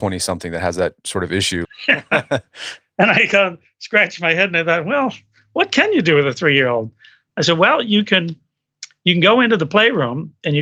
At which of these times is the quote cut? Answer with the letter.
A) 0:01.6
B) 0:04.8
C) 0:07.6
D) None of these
A